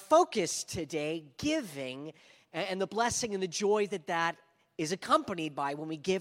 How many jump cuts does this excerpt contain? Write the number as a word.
zero